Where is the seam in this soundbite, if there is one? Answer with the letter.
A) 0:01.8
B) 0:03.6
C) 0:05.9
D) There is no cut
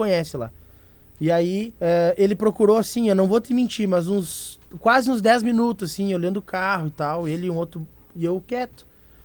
A